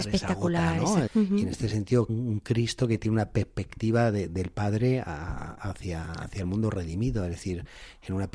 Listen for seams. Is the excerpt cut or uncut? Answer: cut